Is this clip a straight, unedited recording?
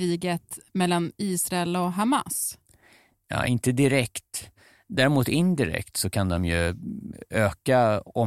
yes; 0 cuts

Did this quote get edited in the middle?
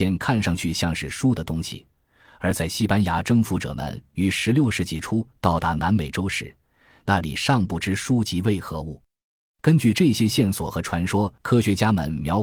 yes; 1 cut; at 11.4 s

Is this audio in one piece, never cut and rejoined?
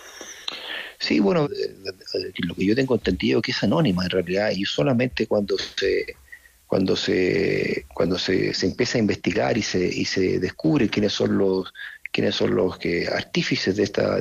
no; 1 cut; at 1.4 s

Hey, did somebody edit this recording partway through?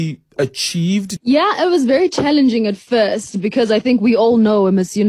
yes; 1 cut; at 1.2 s

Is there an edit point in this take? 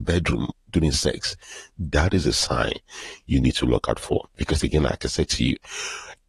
no; 0 cuts

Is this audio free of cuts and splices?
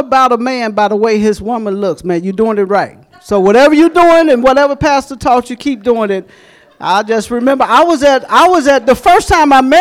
yes; 0 cuts

